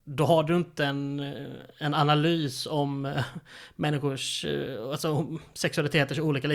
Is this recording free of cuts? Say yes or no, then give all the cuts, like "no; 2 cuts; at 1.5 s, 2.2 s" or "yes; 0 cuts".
yes; 0 cuts